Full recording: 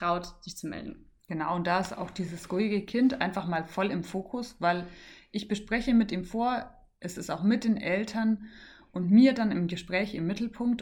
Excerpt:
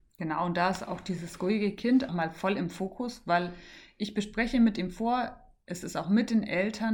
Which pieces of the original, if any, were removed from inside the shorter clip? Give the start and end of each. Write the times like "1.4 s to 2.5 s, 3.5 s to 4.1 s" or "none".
3.2 s to 3.4 s